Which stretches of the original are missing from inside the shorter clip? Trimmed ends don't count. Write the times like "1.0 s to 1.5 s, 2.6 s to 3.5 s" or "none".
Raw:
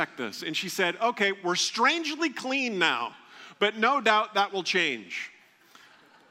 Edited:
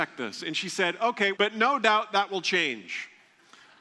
1.4 s to 3.6 s

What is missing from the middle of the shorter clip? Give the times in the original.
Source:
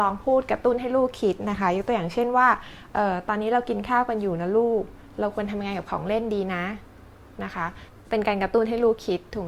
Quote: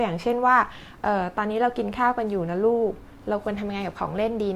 none

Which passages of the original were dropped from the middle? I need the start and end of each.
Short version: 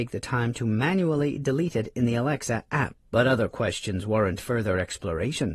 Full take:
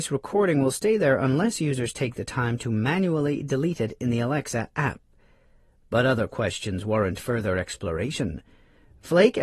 5.1 s to 5.8 s

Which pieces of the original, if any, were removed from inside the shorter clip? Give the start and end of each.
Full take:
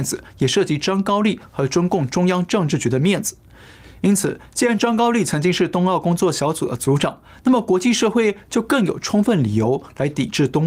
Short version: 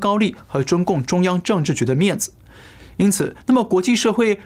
4.4 s to 7.4 s

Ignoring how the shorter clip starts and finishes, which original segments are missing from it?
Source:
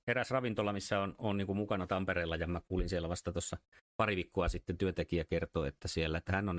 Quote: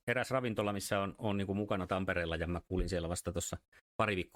none

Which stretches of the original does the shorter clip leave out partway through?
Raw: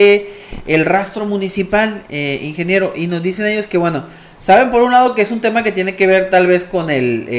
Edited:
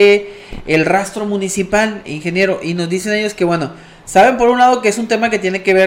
2.1 s to 2.4 s

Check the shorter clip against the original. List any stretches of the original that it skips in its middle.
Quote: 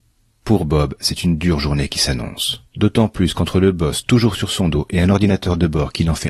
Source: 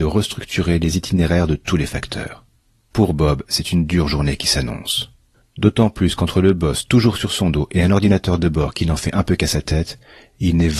5.2 s to 5.5 s

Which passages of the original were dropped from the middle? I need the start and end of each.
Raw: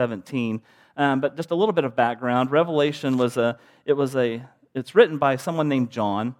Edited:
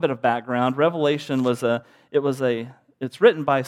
none

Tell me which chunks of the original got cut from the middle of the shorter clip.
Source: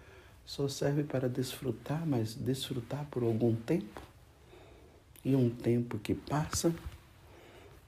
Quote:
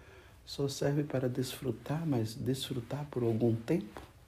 none

